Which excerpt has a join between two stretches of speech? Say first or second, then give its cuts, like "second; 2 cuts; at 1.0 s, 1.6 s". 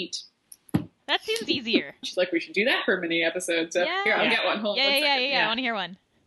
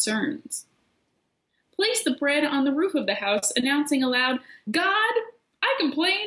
first; 1 cut; at 2.0 s